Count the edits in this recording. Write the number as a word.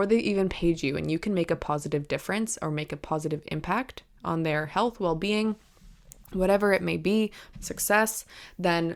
one